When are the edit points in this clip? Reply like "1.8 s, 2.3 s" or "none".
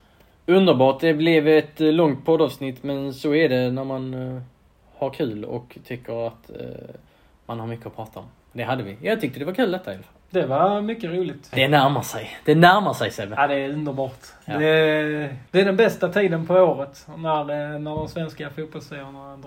11.5 s, 15.5 s

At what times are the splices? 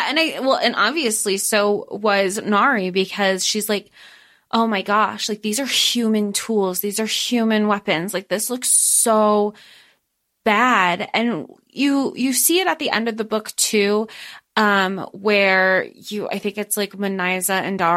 none

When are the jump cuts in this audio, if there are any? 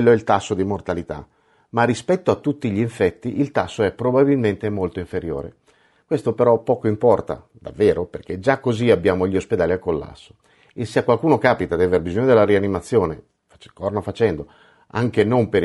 none

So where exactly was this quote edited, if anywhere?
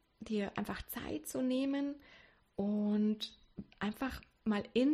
none

